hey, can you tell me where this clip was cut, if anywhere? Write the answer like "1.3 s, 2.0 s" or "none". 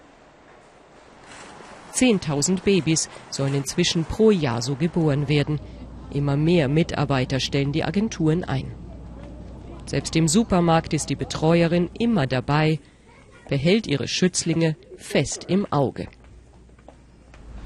none